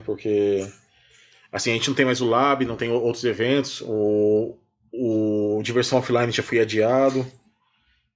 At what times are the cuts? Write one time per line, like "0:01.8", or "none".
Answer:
none